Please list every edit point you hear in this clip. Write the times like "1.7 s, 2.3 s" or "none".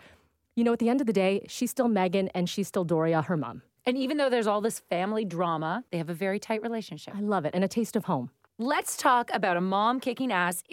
3.8 s